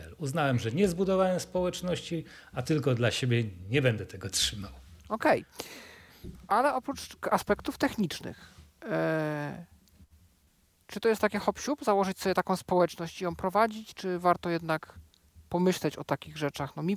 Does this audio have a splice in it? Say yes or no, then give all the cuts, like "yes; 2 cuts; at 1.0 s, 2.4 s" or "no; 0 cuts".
no; 0 cuts